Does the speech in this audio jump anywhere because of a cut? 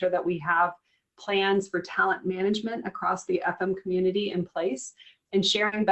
no; 0 cuts

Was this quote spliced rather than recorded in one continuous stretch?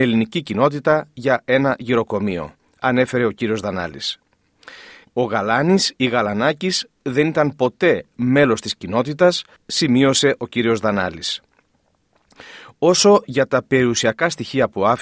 yes; 2 cuts; at 5.1 s, 9.6 s

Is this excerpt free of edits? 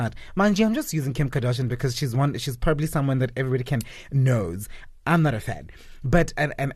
yes; 0 cuts

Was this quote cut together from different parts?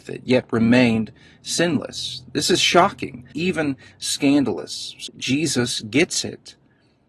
yes; 2 cuts; at 3.3 s, 5.1 s

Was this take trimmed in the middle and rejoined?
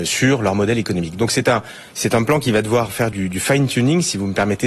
no; 0 cuts

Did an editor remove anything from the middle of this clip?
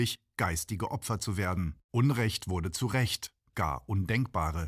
yes; 2 cuts; at 1.8 s, 3.5 s

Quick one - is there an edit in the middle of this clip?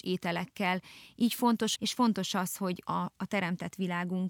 yes; 2 cuts; at 1.8 s, 2.9 s

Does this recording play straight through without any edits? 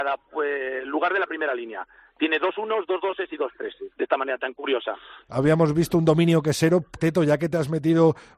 no; 3 cuts; at 3.9 s, 5.3 s, 7.0 s

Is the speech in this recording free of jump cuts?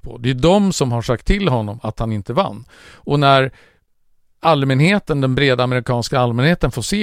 yes; 0 cuts

